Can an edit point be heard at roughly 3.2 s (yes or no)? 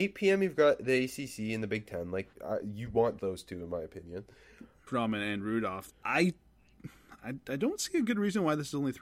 yes